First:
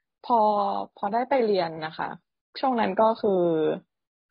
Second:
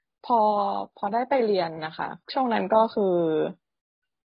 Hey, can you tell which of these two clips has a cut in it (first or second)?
second